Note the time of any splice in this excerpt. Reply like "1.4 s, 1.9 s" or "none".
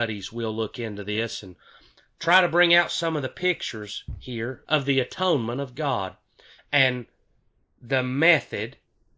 4.6 s, 6.6 s